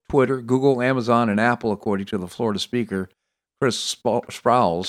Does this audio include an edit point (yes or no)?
no